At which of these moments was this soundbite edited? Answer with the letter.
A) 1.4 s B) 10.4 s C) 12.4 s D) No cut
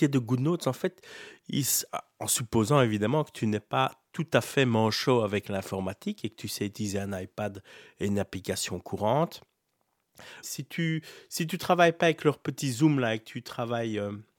B